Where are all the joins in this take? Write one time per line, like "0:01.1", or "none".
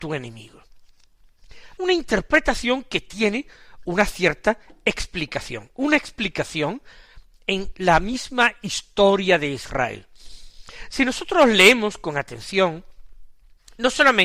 0:01.8